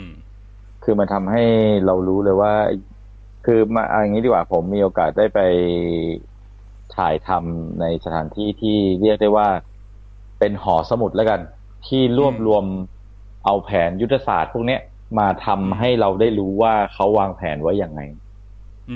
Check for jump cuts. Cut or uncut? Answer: uncut